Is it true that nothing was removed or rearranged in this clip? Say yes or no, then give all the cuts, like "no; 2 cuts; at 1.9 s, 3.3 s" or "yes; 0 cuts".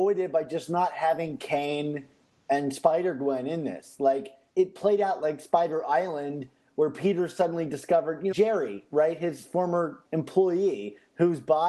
no; 3 cuts; at 4.5 s, 8.3 s, 10.0 s